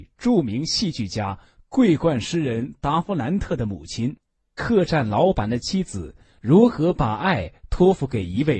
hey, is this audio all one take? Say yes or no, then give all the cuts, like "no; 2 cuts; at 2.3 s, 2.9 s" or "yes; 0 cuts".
no; 1 cut; at 4.5 s